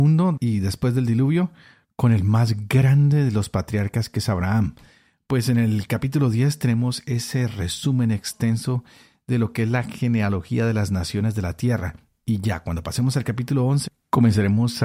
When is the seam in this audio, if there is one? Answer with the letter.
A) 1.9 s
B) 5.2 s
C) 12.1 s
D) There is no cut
D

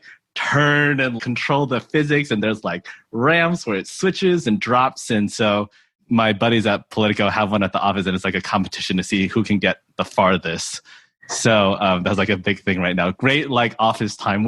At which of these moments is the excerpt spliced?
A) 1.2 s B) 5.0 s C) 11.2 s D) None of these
A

